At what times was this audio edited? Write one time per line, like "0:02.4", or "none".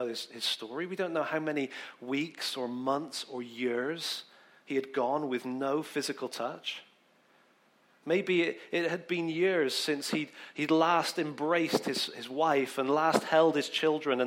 none